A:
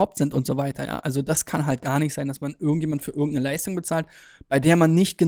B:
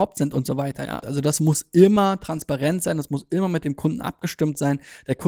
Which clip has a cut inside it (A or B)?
B